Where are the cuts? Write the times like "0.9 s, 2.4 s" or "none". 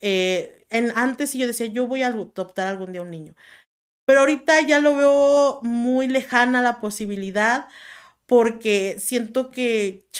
none